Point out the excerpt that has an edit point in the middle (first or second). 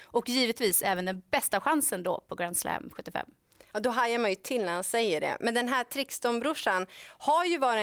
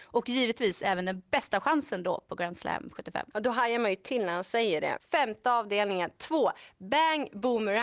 second